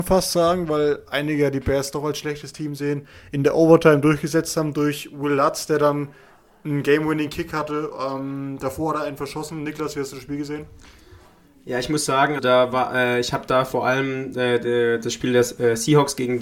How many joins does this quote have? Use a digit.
1